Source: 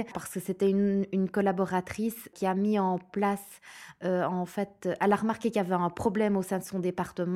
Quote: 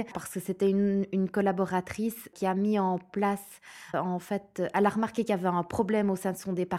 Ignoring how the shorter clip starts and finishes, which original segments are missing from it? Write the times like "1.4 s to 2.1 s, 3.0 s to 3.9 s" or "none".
3.9 s to 4.2 s